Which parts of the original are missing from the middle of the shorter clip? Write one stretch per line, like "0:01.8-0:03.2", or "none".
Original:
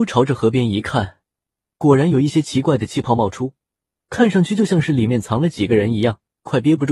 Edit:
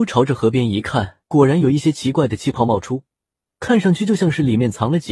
0:01.2-0:01.7